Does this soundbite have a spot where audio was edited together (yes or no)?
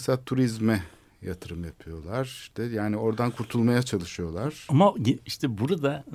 yes